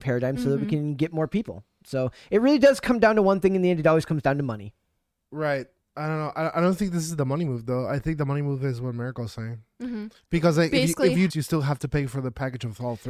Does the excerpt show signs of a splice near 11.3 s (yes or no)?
yes